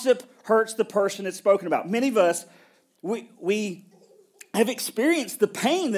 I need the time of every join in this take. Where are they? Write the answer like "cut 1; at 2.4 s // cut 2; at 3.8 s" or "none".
none